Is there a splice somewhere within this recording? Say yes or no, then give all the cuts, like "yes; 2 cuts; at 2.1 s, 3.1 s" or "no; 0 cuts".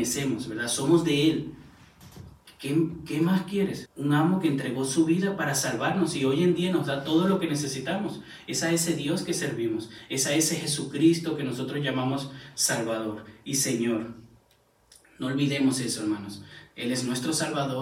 yes; 1 cut; at 3.9 s